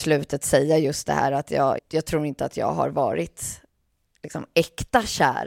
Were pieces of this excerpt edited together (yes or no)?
yes